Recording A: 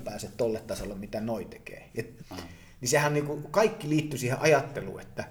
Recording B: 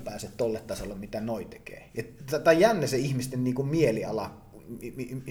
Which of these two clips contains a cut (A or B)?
A